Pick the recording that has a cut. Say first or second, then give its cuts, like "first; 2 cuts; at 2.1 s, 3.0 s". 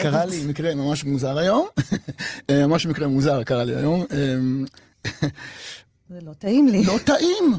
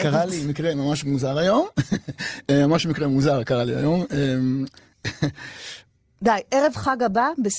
first; 1 cut; at 6.1 s